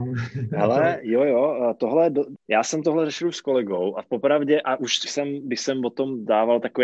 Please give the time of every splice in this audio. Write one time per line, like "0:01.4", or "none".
0:02.3
0:05.1